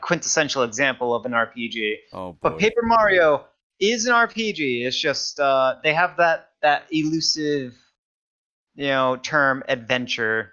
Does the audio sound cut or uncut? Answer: uncut